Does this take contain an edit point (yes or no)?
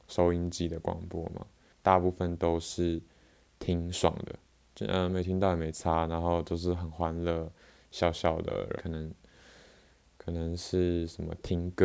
yes